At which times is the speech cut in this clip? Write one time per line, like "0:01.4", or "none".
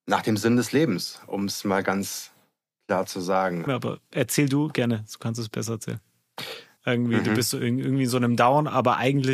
0:03.7
0:06.8